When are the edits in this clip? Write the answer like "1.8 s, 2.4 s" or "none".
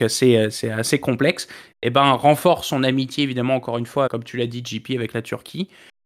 1.7 s, 4.1 s